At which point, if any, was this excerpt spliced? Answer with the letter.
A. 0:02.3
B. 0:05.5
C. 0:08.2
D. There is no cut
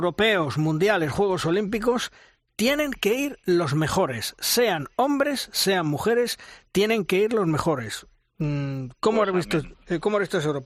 D